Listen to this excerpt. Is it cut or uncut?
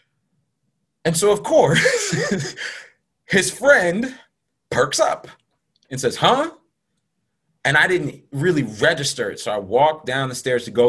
uncut